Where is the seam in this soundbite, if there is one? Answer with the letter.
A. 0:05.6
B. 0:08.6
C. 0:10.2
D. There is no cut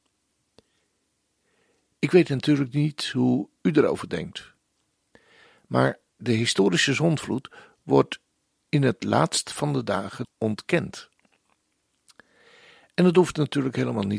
C